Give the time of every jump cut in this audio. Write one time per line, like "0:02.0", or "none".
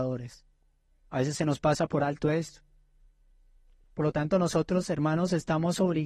none